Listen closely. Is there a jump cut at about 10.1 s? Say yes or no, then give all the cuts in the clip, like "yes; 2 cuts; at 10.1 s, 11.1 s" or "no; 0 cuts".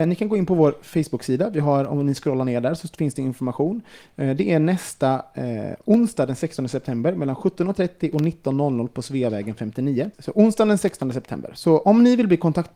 no; 0 cuts